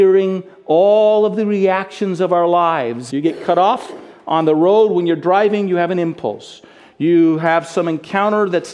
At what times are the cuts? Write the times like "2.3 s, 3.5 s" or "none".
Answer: 3.1 s

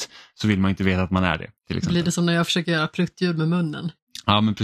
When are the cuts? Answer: none

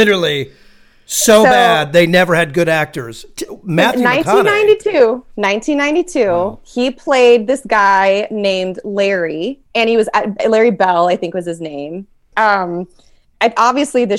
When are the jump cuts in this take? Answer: 9.7 s, 12.3 s

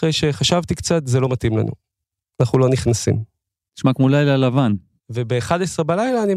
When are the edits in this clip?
3.7 s, 5.0 s

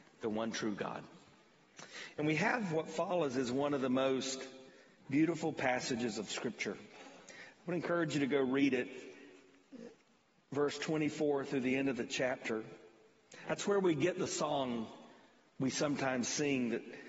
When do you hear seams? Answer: none

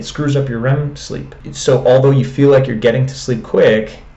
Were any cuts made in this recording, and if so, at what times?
none

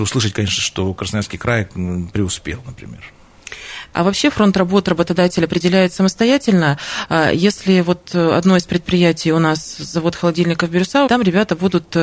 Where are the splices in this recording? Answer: 3.9 s, 11.1 s

